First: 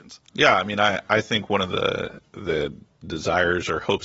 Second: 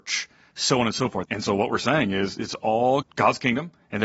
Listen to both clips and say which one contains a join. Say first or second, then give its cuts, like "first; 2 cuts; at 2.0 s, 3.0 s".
second; 2 cuts; at 1.3 s, 3.0 s